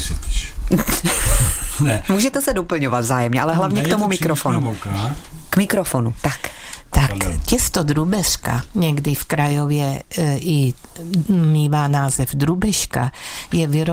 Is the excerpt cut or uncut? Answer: uncut